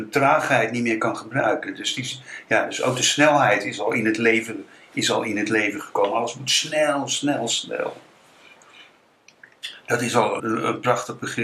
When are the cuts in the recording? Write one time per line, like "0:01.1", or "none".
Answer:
0:10.4